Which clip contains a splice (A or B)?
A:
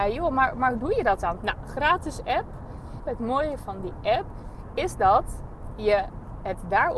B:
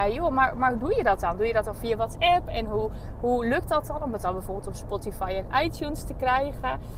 A